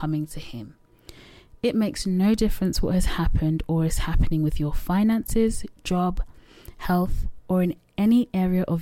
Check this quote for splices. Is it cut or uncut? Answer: uncut